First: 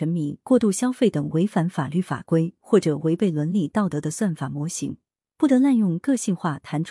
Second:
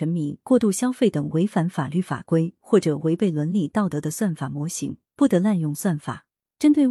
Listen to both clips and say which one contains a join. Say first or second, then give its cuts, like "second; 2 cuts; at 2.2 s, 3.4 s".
second; 1 cut; at 5.1 s